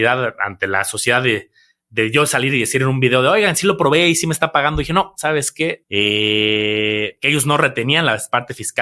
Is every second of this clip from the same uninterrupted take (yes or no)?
no